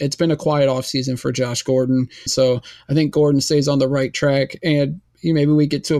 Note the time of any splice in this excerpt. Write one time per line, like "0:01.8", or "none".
0:02.3